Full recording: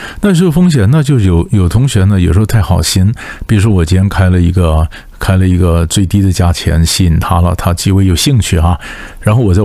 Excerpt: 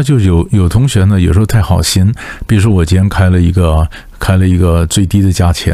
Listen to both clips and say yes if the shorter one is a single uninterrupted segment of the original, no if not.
yes